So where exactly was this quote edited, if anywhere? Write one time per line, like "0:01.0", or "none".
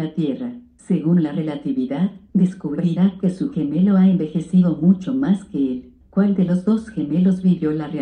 0:02.3
0:06.0